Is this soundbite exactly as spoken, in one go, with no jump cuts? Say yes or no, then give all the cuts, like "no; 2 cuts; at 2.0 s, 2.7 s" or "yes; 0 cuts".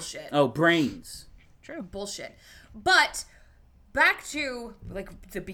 no; 1 cut; at 1.5 s